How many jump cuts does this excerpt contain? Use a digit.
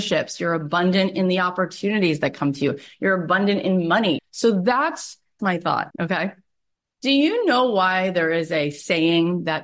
2